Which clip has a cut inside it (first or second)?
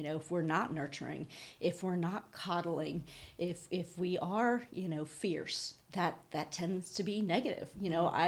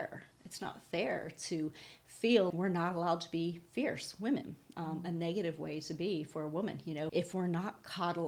second